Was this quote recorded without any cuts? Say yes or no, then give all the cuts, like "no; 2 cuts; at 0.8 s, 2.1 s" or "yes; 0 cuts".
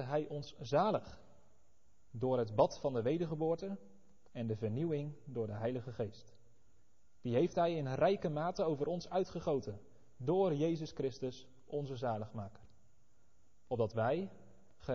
no; 1 cut; at 2.1 s